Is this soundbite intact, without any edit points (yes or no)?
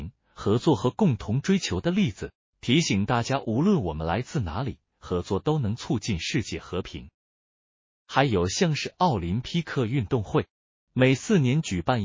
yes